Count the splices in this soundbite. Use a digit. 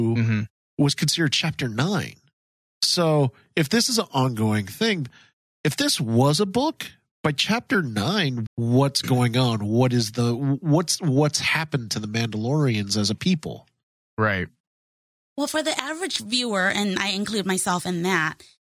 1